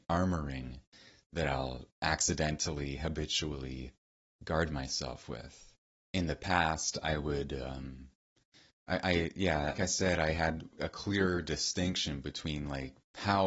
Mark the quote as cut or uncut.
cut